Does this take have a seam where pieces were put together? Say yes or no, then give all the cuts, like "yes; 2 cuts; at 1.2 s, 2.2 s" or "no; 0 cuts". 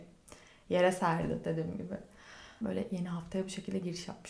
yes; 1 cut; at 2.6 s